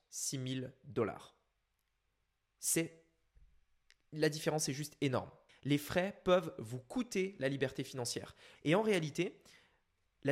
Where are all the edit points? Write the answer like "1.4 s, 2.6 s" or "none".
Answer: 5.5 s, 8.5 s